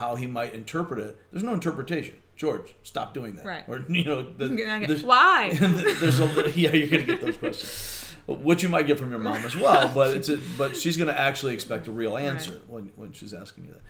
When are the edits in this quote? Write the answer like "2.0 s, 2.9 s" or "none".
none